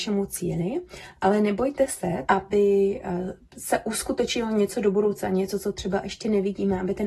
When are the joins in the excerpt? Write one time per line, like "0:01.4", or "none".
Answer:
0:02.3

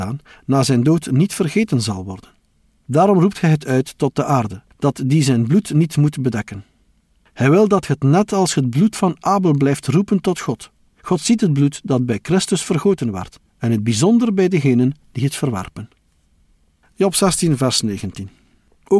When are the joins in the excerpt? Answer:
0:10.9

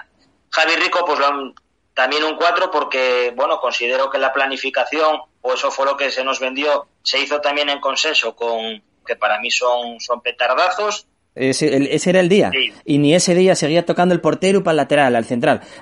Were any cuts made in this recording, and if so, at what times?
0:09.1
0:11.4

